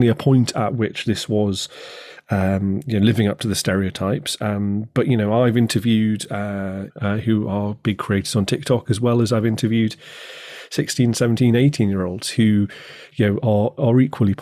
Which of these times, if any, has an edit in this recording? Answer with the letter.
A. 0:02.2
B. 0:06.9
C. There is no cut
B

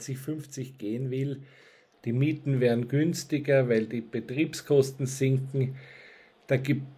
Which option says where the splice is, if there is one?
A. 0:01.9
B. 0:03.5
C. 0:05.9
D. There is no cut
A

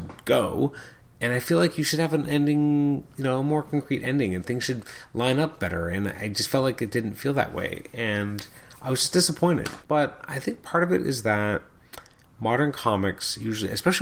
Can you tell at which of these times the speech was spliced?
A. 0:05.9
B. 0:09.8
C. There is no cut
B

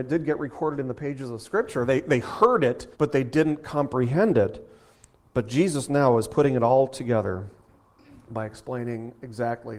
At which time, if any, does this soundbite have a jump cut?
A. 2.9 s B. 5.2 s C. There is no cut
A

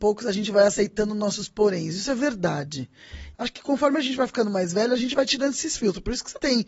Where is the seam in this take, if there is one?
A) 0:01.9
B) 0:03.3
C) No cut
B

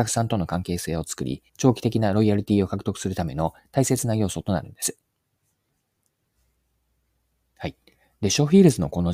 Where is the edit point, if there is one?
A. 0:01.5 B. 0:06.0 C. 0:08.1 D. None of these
A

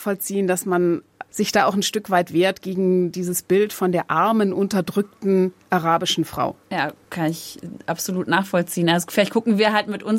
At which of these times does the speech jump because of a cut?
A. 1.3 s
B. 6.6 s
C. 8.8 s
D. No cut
A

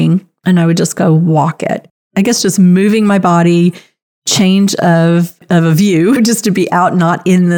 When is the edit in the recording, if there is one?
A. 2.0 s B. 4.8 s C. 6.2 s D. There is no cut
C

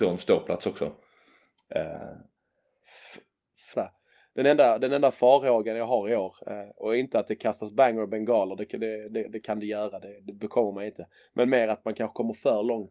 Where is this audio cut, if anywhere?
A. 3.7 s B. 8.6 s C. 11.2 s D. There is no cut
A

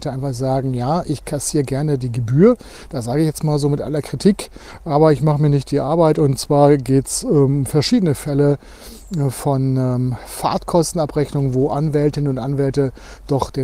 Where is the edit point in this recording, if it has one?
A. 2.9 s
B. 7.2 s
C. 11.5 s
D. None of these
D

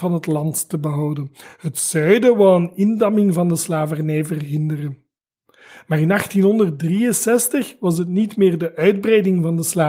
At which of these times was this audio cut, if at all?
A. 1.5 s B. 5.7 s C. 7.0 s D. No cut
D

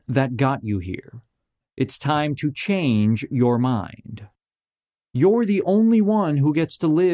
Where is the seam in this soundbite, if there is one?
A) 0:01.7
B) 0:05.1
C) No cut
C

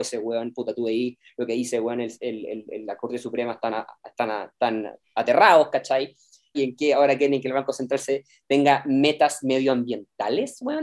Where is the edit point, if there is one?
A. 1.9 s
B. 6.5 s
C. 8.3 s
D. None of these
B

